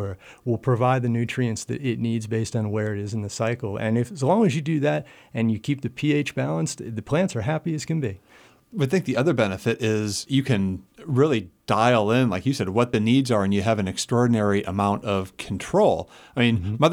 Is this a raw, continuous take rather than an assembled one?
yes; 0 cuts

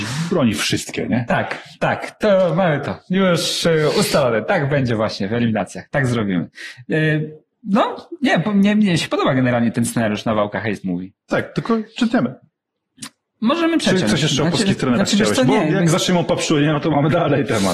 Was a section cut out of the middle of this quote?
no; 0 cuts

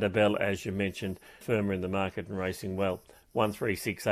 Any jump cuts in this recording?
yes; 1 cut; at 1.4 s

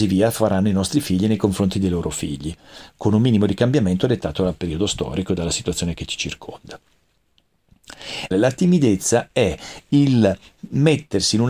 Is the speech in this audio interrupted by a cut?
yes; 1 cut; at 8.3 s

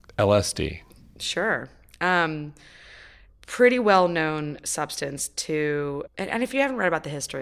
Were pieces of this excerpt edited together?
yes; 1 cut; at 6.1 s

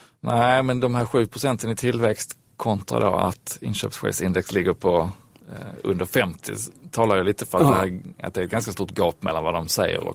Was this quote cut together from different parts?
no; 0 cuts

